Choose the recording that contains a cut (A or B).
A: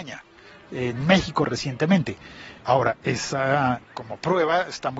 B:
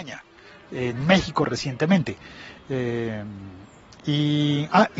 A